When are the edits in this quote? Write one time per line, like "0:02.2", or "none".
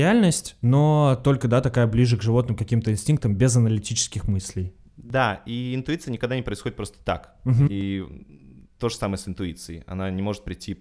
0:07.7